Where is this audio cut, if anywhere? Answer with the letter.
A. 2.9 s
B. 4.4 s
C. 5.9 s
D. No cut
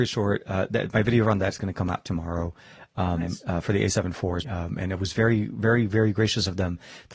B